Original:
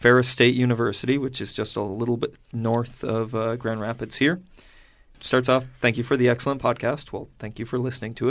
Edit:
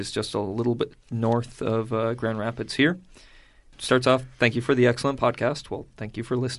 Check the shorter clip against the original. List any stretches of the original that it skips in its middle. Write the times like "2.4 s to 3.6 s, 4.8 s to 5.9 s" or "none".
none